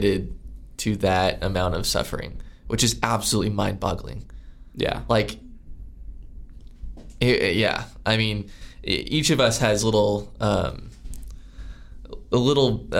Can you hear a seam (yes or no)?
no